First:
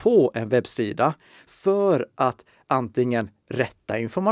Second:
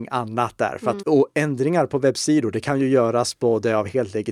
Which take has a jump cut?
second; 1 cut; at 1.0 s

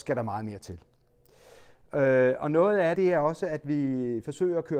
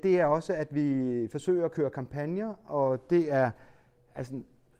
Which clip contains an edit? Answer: first; 1 cut; at 2.9 s

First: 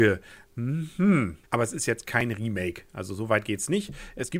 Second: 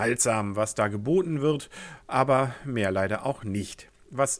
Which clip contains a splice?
first; 1 cut; at 1.5 s

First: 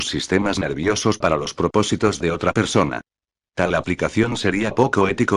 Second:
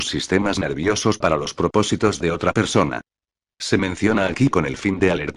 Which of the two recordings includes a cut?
second; 1 cut; at 3.4 s

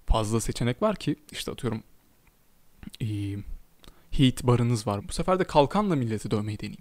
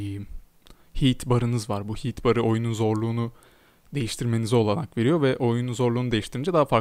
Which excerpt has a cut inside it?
first; 1 cut; at 5.0 s

